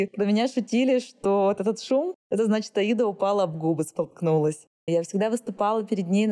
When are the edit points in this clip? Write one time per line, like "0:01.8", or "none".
0:04.9